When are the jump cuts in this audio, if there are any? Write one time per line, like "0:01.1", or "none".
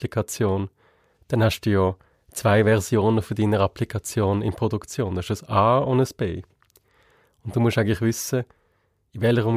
none